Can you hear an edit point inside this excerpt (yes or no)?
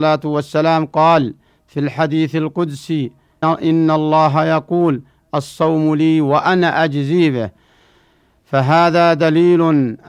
yes